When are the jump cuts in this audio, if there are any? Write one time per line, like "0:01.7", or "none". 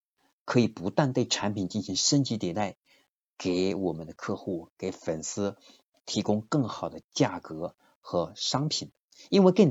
none